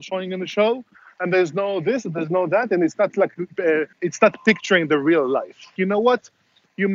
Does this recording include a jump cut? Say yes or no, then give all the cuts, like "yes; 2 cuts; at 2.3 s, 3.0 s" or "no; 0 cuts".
yes; 2 cuts; at 3.9 s, 5.8 s